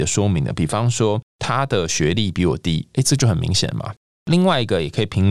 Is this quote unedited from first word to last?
no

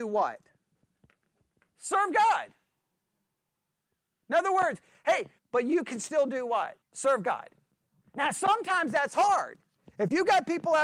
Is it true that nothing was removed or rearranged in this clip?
no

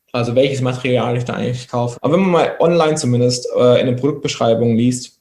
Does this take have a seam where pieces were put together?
yes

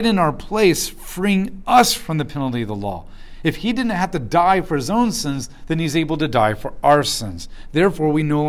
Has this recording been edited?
no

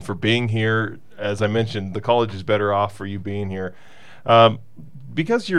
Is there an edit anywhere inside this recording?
no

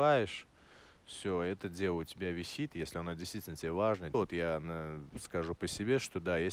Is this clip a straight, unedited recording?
no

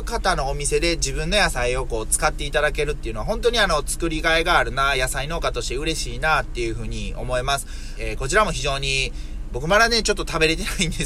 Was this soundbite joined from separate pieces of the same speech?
yes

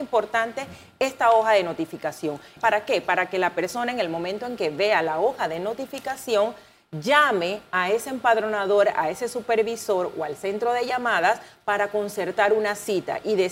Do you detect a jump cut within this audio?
yes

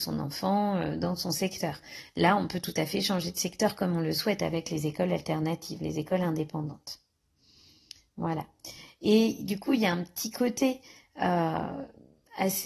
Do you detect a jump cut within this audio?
no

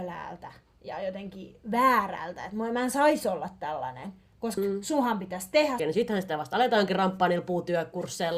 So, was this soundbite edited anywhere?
yes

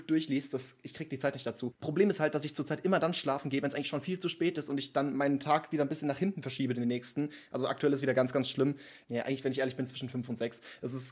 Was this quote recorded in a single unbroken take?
no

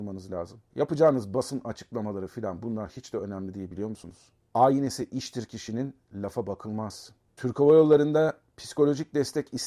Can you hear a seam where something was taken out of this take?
no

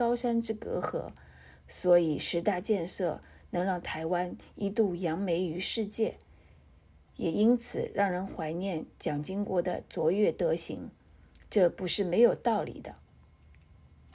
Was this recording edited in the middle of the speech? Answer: no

